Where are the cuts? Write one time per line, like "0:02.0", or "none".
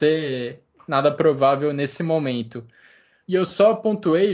0:03.2